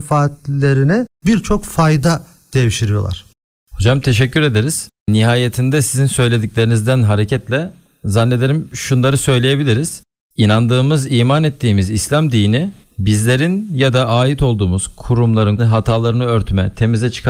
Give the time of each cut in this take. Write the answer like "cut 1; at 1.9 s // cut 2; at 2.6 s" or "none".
cut 1; at 15.6 s